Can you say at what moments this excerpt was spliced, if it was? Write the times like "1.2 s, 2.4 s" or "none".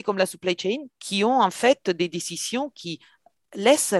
0.9 s